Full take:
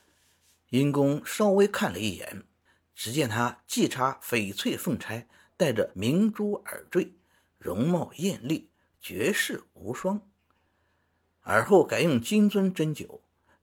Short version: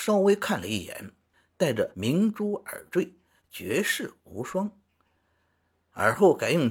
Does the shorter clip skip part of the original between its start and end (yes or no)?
yes